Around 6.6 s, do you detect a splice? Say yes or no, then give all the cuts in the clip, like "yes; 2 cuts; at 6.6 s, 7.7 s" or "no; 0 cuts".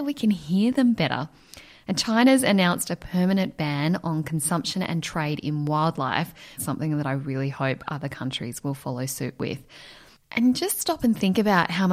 yes; 1 cut; at 6.6 s